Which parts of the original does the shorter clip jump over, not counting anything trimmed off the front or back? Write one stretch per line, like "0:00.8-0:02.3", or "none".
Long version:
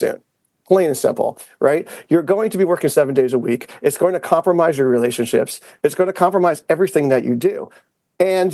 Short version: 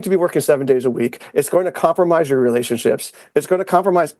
none